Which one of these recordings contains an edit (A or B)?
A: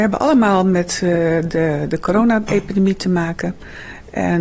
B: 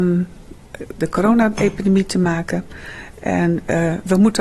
B